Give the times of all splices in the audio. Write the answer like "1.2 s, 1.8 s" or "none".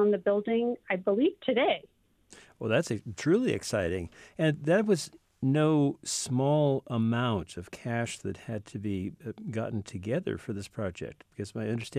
none